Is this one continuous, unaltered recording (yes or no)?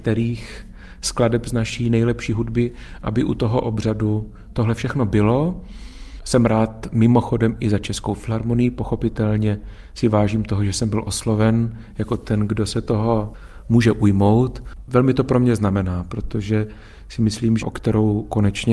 no